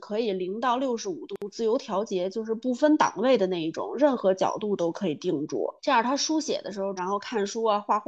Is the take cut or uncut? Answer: cut